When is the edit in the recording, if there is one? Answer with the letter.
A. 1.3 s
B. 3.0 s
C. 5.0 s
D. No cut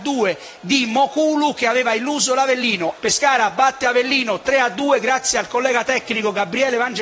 B